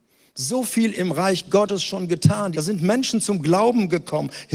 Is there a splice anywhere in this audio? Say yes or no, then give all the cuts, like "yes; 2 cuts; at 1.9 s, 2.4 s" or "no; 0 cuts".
yes; 1 cut; at 2.5 s